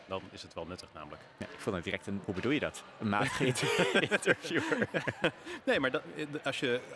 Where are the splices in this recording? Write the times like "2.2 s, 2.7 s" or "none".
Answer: 2.2 s

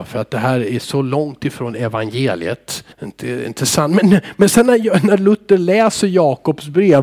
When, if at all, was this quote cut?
2.9 s

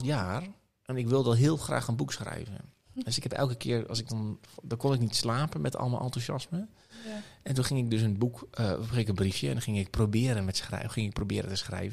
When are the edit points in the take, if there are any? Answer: none

